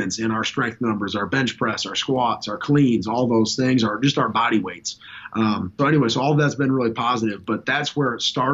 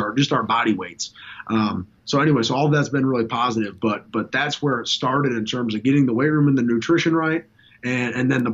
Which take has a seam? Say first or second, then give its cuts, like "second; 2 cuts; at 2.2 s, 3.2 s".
first; 2 cuts; at 5.8 s, 7.5 s